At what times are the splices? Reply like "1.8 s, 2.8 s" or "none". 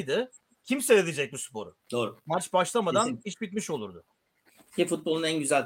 1.8 s